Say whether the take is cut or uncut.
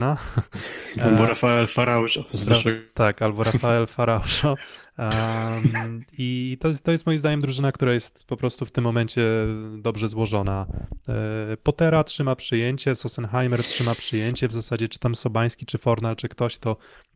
uncut